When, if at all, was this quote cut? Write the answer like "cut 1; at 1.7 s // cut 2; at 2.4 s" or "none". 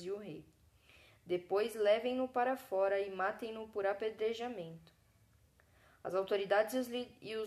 none